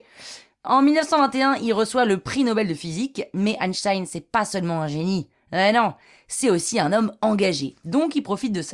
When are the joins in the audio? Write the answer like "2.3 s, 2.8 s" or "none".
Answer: none